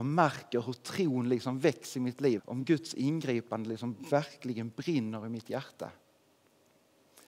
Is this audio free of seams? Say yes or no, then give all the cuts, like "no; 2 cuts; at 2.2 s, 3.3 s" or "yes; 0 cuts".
no; 1 cut; at 2.4 s